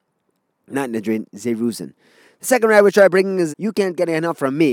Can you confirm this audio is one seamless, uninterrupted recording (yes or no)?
no